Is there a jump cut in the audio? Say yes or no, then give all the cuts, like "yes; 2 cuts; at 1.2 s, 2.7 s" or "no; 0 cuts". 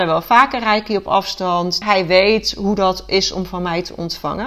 yes; 1 cut; at 1.8 s